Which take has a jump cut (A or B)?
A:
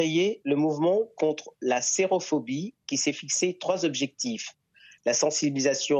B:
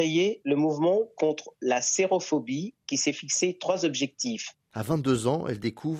B